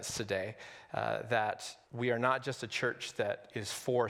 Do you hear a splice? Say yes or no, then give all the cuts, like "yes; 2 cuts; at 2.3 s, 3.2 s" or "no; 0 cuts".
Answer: yes; 1 cut; at 1.8 s